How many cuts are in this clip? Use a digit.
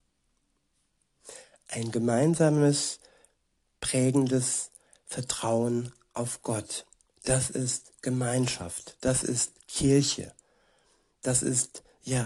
0